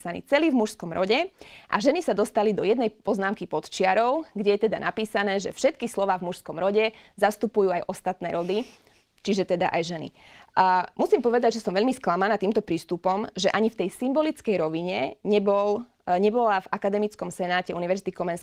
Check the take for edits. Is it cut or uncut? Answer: uncut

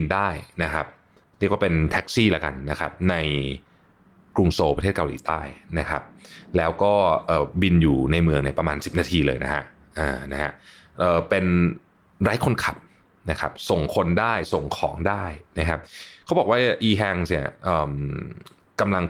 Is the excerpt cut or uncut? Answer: uncut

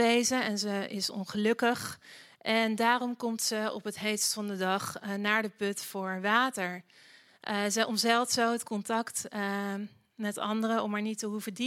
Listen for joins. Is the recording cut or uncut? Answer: uncut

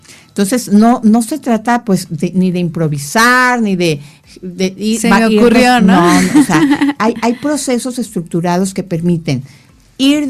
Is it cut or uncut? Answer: uncut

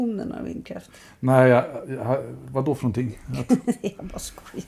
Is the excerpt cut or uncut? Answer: uncut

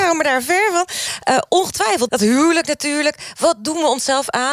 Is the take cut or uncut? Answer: cut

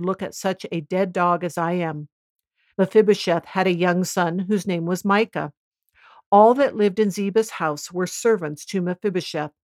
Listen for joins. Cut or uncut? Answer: cut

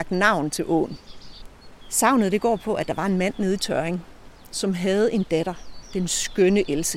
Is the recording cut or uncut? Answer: uncut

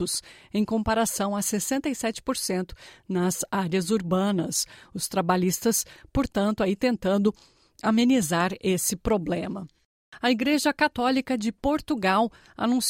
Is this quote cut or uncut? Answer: uncut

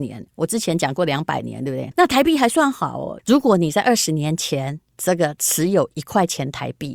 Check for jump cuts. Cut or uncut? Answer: cut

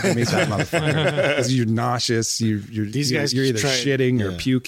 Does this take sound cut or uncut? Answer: uncut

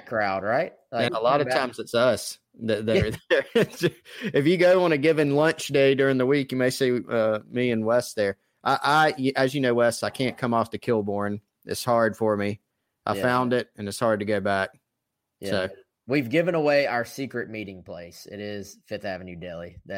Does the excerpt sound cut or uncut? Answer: cut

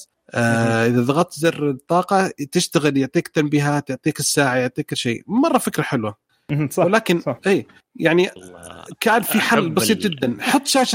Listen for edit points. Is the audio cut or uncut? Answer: cut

